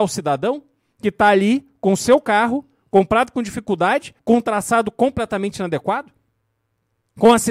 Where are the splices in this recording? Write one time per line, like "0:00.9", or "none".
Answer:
0:04.2